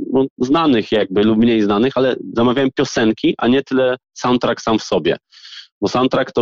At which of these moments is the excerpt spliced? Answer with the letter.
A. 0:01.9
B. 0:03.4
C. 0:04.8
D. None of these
D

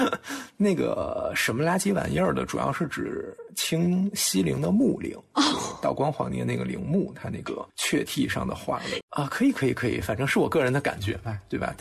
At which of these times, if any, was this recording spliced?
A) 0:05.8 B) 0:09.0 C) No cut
B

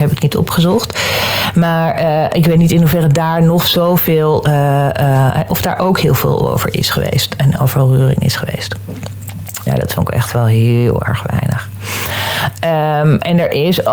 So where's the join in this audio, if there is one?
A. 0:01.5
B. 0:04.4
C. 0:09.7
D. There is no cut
C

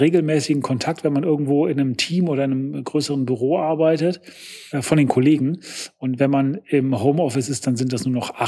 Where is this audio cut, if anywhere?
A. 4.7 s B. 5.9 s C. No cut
A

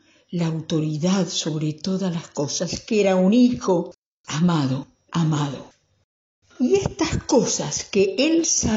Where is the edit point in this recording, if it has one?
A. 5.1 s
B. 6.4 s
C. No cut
A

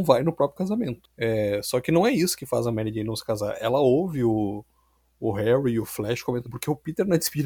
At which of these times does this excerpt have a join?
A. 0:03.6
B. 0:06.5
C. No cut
B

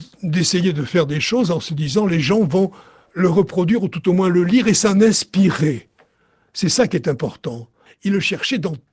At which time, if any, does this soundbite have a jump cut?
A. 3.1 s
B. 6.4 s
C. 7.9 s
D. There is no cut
C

